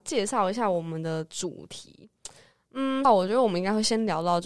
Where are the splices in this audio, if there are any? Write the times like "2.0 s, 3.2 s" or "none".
3.0 s